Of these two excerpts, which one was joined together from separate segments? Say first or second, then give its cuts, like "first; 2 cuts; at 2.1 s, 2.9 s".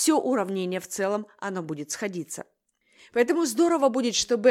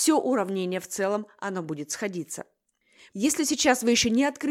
second; 1 cut; at 3.1 s